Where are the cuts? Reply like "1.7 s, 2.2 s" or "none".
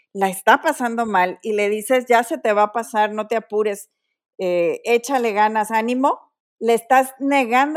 none